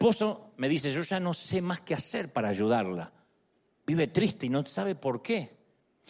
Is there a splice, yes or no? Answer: no